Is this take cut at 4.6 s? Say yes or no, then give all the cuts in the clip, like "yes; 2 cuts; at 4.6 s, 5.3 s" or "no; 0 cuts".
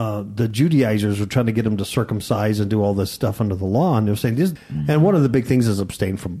yes; 1 cut; at 4.6 s